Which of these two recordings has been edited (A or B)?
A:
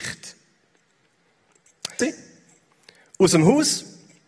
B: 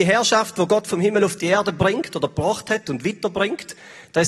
A